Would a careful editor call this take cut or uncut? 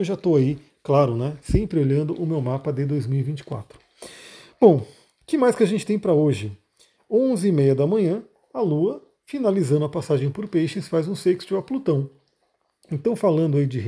uncut